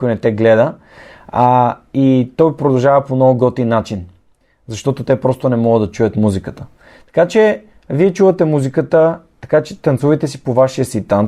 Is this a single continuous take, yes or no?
yes